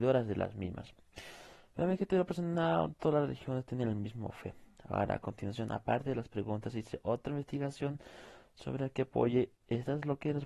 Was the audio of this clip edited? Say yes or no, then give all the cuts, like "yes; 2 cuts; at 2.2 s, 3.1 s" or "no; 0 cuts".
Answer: no; 0 cuts